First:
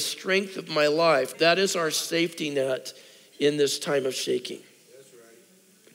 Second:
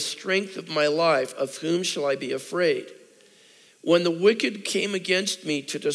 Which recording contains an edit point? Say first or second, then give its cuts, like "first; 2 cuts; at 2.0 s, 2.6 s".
first; 1 cut; at 1.3 s